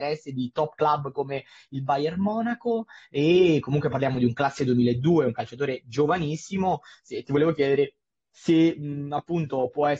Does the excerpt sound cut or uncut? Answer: uncut